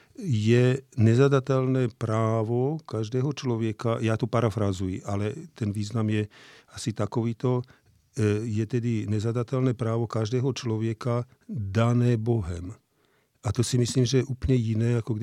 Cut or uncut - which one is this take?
uncut